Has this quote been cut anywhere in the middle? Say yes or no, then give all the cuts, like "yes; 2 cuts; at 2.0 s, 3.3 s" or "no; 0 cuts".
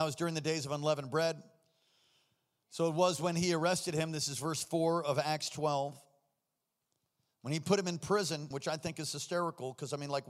yes; 1 cut; at 8.5 s